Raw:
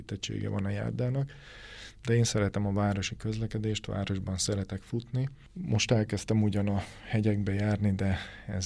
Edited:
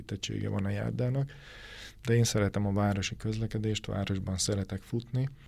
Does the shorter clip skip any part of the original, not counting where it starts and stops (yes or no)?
no